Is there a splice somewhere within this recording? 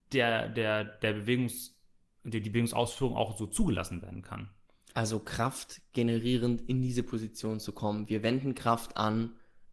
no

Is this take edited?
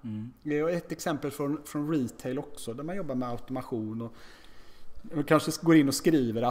yes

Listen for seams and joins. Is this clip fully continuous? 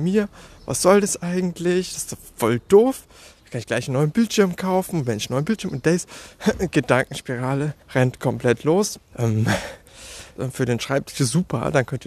no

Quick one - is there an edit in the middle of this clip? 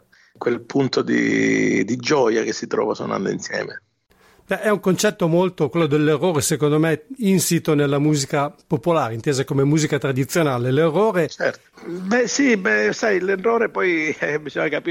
yes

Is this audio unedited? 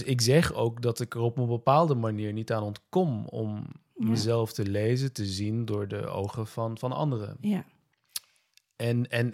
yes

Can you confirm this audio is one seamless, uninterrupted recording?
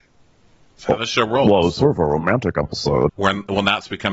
no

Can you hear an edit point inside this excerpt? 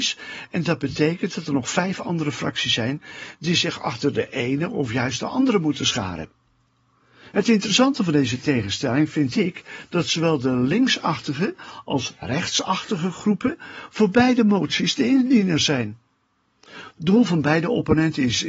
no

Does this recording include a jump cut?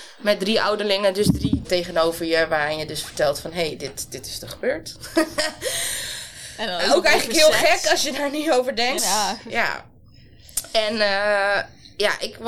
yes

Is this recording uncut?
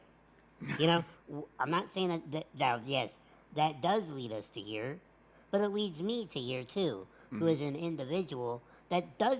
no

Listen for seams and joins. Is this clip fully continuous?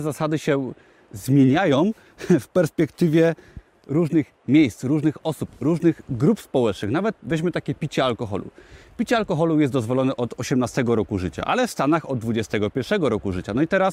yes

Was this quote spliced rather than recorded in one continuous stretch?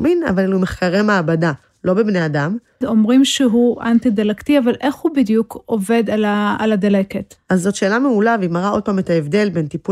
yes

